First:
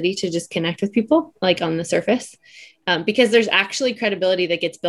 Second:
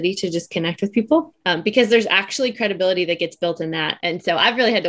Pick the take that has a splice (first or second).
second